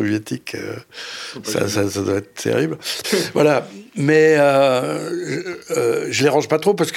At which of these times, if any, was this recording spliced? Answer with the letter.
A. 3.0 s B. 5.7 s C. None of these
A